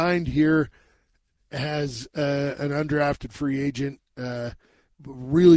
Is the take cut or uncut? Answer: uncut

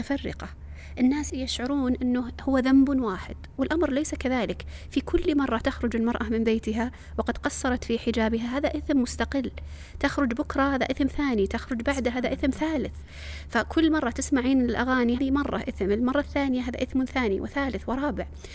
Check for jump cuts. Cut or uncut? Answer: cut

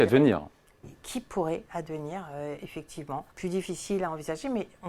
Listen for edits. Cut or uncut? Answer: cut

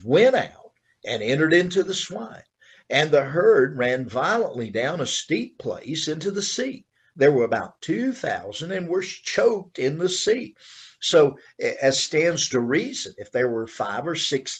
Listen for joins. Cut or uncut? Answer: uncut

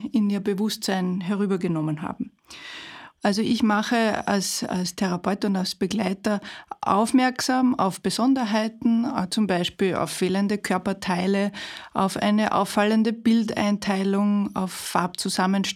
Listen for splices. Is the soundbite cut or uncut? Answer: cut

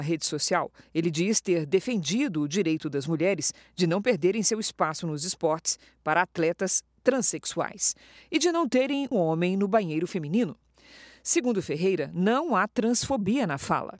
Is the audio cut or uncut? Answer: cut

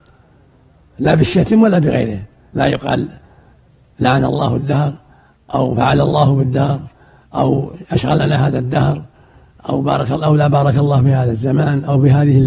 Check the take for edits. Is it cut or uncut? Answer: uncut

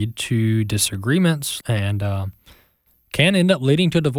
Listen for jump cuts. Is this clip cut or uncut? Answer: cut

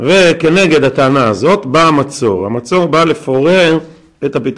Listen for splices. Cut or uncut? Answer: uncut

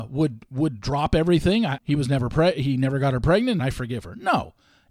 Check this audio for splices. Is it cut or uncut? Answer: cut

